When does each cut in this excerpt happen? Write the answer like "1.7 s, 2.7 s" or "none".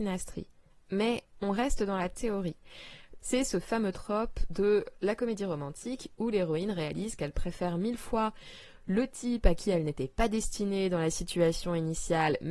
3.2 s